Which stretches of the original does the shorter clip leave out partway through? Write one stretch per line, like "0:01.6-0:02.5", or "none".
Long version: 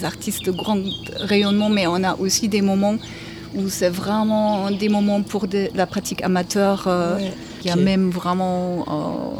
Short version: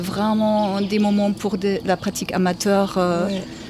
none